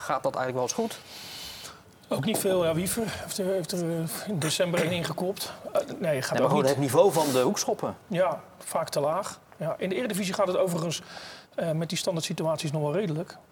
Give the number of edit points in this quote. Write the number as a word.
zero